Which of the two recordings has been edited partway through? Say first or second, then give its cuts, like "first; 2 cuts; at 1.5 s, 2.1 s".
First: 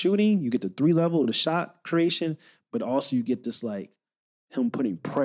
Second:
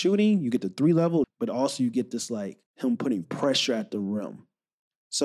second; 2 cuts; at 1.2 s, 2.7 s